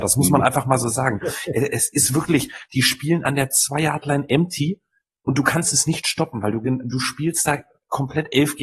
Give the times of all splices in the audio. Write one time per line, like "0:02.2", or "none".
none

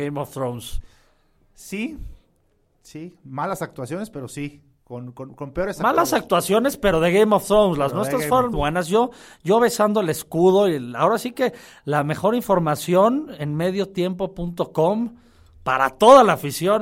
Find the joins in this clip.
0:08.5

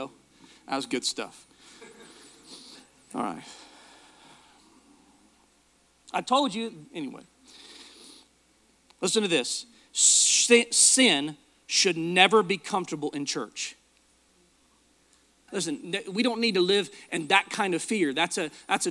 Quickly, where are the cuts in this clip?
0:06.9
0:15.5

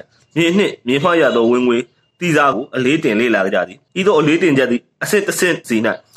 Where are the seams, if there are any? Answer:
0:02.5
0:03.9

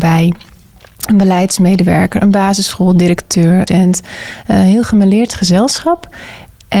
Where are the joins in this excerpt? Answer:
0:03.7

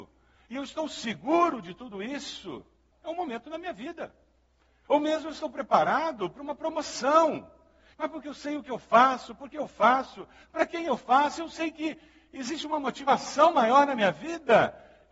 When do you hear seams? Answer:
0:02.9
0:04.8
0:07.9

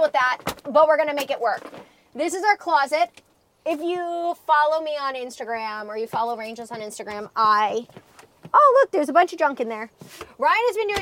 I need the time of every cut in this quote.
none

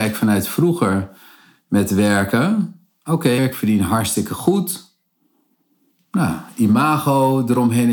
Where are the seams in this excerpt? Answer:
0:03.4

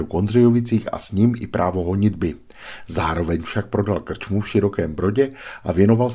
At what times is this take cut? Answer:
none

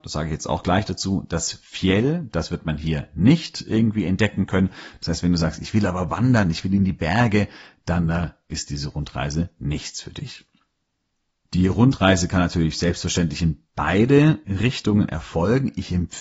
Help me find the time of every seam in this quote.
none

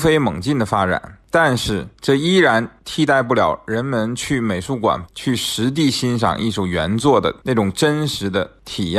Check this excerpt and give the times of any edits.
0:05.0

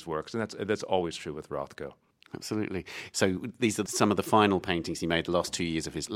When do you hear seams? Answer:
0:03.1

